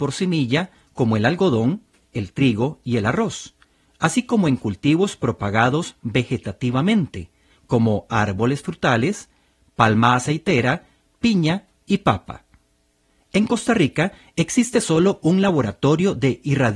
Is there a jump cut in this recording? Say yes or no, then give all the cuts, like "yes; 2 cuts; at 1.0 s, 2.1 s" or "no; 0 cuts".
no; 0 cuts